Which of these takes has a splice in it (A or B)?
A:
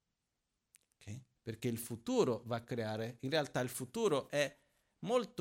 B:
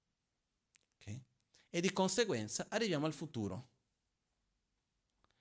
A